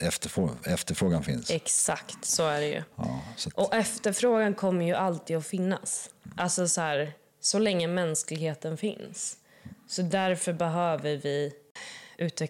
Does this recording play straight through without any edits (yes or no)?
yes